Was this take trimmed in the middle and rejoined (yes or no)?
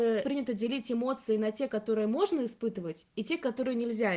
no